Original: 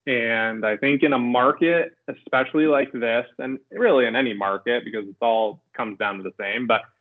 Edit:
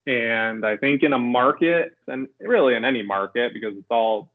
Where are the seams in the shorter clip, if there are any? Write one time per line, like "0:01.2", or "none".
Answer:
0:02.0